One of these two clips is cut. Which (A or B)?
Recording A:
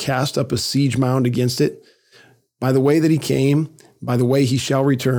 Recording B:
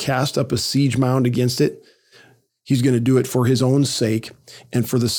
B